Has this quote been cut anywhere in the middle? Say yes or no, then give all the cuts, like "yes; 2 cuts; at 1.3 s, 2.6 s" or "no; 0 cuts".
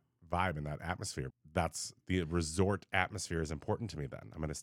yes; 1 cut; at 1.3 s